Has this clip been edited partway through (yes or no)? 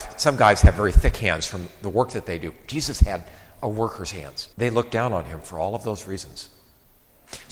yes